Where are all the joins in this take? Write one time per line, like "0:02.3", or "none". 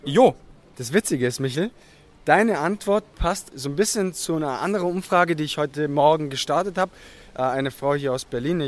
0:03.5